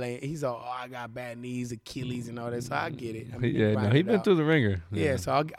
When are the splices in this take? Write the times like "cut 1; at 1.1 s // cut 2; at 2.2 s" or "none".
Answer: none